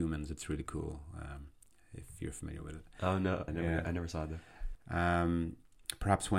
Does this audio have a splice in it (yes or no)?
yes